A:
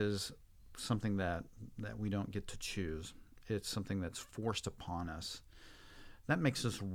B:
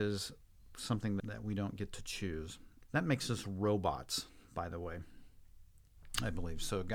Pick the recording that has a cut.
B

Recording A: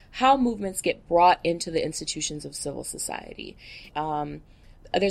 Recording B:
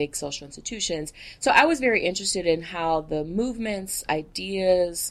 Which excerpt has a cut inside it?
A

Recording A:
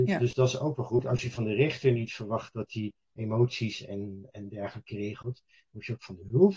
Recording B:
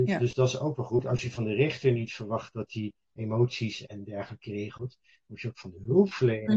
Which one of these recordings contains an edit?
B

